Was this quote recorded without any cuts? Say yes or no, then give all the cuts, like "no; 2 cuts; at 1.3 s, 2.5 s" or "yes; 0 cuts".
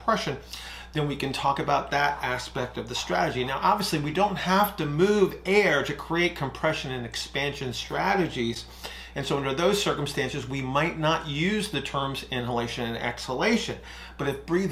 yes; 0 cuts